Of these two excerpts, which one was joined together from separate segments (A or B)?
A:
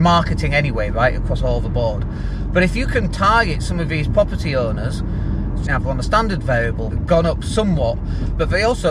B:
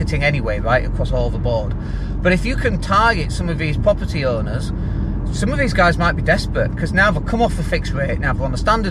A